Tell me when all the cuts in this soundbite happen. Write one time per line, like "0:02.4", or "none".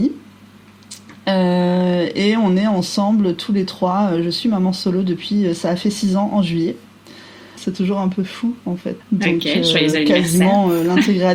0:07.6
0:09.0